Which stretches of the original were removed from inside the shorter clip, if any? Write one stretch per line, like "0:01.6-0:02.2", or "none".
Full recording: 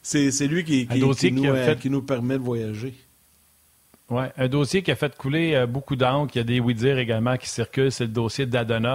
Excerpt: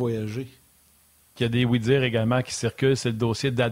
0:03.8-0:06.3